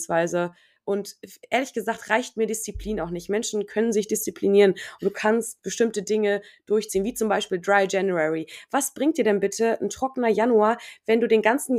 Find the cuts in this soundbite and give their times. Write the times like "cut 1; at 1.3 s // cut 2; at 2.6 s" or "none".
none